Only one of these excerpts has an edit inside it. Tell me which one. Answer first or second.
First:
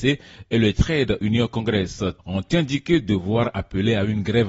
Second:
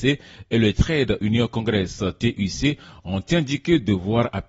first